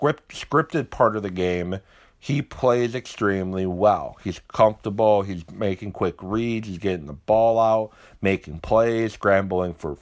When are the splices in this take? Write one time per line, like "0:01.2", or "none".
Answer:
none